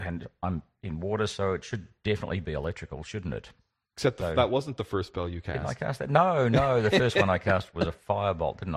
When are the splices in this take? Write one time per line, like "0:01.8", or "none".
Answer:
none